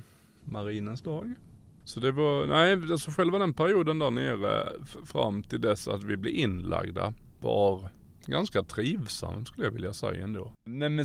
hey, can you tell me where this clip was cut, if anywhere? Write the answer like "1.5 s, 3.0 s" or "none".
none